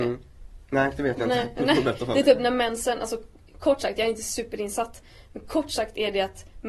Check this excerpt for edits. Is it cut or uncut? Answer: uncut